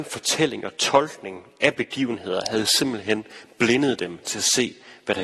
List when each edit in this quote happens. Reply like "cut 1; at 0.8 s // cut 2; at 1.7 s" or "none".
none